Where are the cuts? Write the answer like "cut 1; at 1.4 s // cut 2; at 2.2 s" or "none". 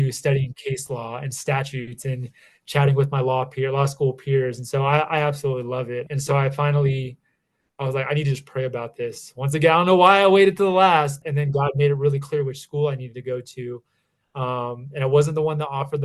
cut 1; at 6.1 s // cut 2; at 11.2 s